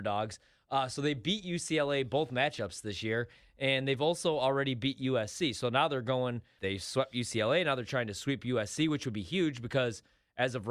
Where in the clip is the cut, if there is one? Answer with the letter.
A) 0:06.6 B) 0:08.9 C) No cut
A